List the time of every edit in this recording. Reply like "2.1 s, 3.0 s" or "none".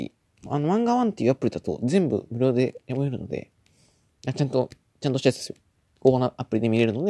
none